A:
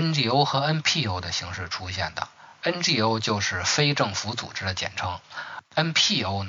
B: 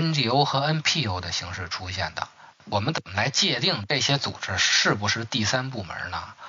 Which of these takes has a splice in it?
B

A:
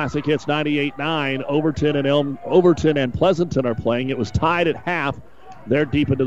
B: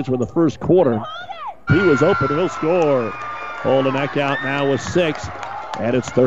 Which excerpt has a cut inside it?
B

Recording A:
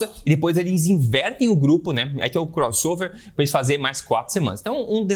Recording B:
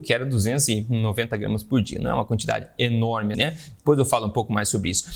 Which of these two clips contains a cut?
B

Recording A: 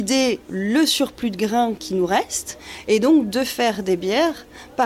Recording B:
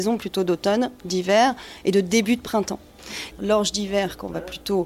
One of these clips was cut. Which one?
B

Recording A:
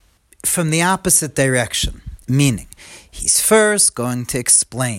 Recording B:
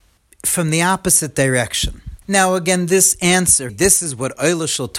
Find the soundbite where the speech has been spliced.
B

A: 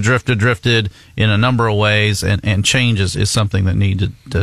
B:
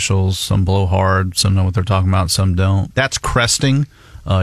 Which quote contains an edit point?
B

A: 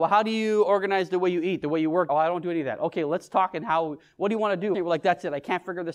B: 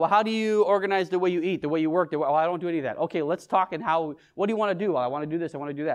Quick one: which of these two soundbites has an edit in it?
A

